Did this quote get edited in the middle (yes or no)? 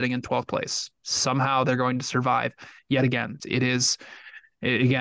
yes